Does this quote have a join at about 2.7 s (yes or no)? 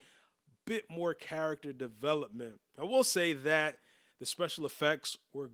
no